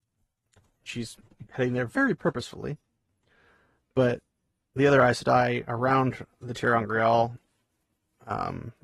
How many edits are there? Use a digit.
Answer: 1